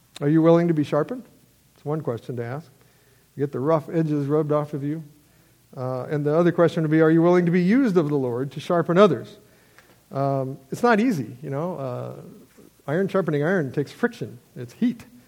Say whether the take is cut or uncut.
uncut